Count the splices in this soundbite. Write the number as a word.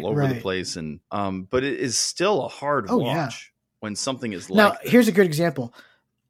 one